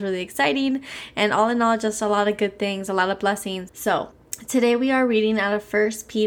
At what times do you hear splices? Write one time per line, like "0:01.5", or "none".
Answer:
0:03.7